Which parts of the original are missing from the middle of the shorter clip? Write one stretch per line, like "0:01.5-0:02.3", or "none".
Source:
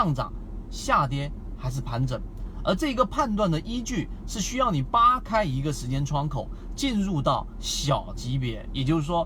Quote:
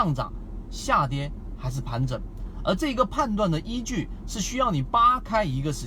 none